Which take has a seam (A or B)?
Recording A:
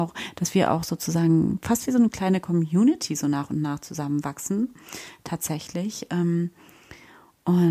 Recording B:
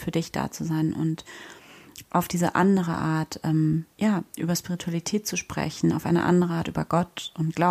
B